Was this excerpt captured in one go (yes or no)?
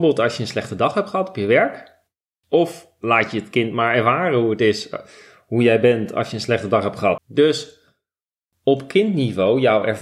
no